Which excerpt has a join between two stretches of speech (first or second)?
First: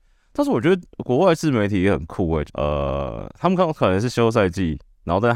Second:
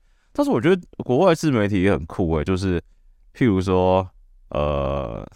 first